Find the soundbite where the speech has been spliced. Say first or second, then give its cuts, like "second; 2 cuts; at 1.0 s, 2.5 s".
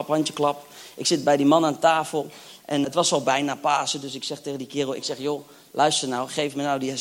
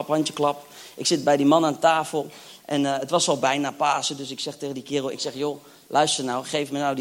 first; 1 cut; at 2.8 s